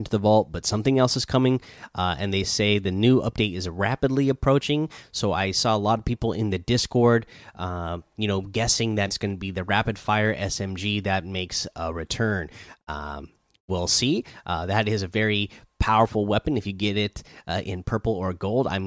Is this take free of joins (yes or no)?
no